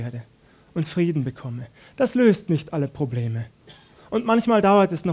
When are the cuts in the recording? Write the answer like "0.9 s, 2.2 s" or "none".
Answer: none